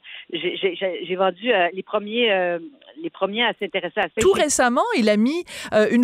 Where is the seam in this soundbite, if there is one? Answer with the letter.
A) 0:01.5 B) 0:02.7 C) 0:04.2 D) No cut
C